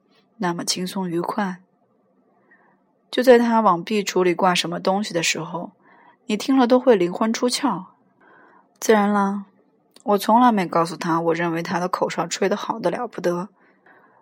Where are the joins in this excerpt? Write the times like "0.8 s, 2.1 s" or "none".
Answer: none